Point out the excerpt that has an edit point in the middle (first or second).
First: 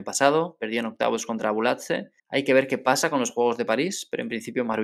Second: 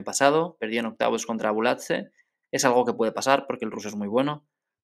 first